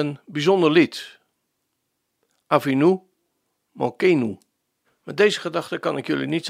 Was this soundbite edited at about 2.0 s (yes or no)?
no